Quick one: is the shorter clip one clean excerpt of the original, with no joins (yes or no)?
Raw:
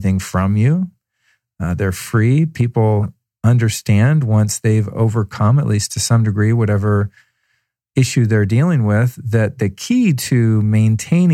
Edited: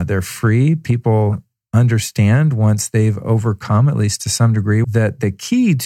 no